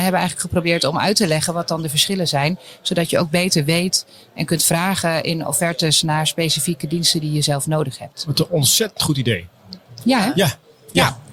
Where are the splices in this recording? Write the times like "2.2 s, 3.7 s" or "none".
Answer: none